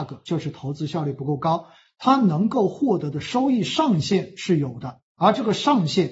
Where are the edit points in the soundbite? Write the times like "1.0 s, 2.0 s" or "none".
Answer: none